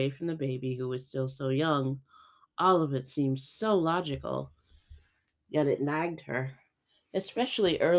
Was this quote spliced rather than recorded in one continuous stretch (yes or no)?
no